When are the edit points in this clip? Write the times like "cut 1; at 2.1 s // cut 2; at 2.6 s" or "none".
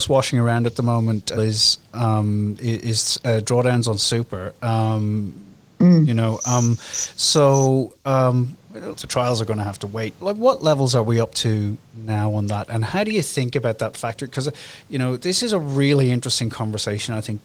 cut 1; at 1.4 s // cut 2; at 8.9 s // cut 3; at 10.2 s